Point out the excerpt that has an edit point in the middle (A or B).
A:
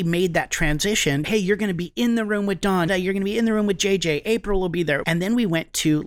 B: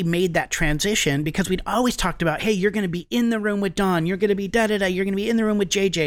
A